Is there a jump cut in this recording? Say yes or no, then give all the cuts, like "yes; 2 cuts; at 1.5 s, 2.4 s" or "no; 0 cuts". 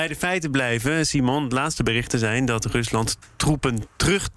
no; 0 cuts